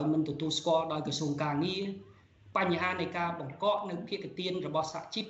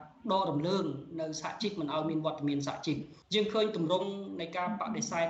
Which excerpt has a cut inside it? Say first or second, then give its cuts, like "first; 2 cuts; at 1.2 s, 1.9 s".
second; 1 cut; at 3.2 s